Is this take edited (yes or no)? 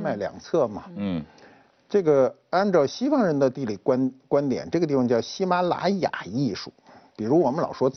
no